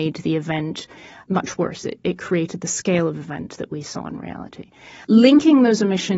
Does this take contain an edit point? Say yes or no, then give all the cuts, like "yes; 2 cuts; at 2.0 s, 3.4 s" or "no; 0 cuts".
no; 0 cuts